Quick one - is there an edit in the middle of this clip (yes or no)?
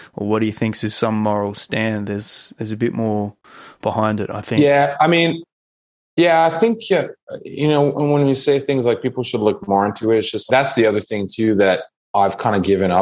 yes